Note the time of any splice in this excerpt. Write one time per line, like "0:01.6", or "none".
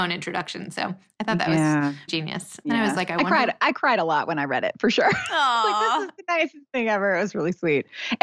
0:02.1